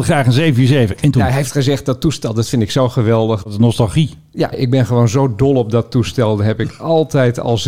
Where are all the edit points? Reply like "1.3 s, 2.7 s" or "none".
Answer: 3.4 s, 4.5 s